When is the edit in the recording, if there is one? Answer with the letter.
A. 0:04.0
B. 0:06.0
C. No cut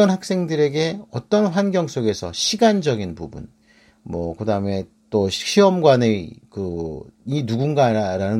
C